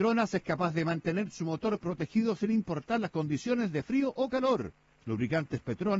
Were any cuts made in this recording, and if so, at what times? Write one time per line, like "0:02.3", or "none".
0:05.0

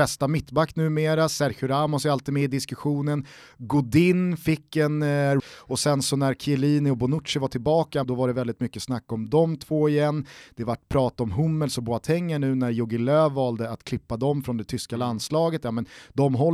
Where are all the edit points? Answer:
0:05.4
0:08.0

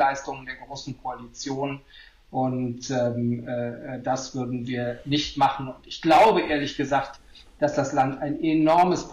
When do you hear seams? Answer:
none

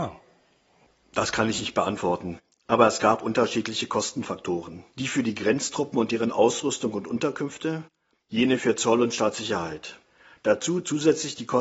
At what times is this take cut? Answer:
none

